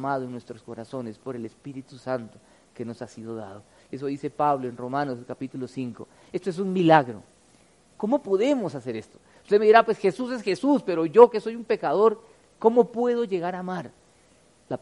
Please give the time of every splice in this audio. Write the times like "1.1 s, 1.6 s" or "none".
7.9 s